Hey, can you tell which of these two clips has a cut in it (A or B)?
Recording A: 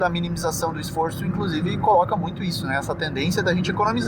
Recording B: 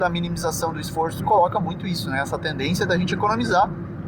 B